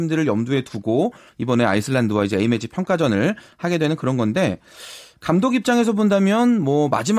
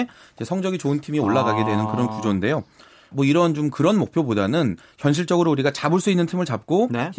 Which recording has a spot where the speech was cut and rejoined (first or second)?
second